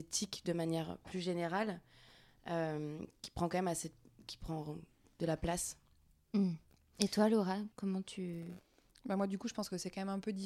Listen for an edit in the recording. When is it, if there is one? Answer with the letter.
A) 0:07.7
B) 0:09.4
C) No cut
A